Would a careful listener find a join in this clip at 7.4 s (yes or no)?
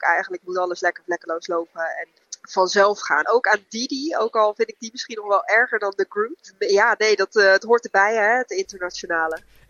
no